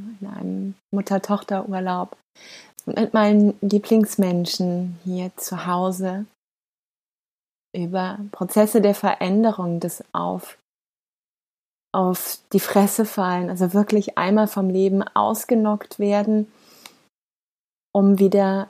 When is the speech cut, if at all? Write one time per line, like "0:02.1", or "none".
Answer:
0:02.7
0:07.6